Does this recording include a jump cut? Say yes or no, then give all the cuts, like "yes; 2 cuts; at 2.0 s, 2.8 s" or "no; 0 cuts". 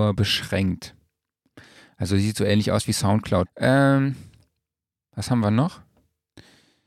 yes; 1 cut; at 3.5 s